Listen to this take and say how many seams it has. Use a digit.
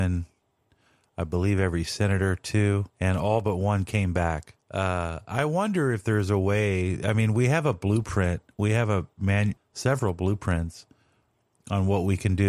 3